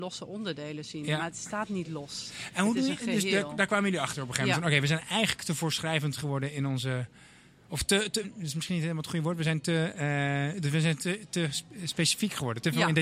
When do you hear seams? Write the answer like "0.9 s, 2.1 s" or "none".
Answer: 8.2 s

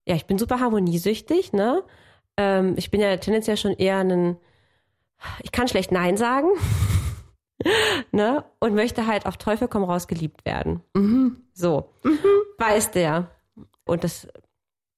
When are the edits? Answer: 13.9 s

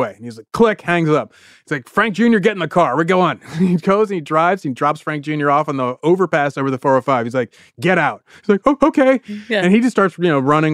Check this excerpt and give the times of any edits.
none

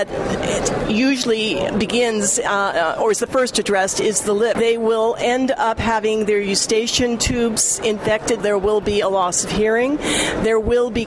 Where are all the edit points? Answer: 4.5 s, 8.4 s

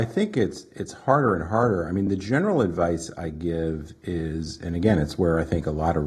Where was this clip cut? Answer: none

